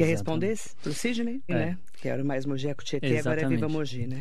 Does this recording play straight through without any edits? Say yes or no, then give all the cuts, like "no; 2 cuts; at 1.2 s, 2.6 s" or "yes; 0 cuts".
no; 1 cut; at 1.5 s